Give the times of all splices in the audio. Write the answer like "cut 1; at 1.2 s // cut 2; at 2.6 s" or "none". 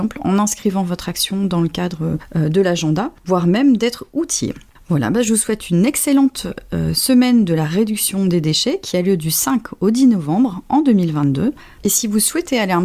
none